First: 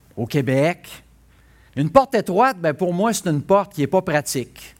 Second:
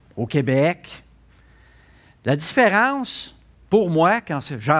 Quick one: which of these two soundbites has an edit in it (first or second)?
first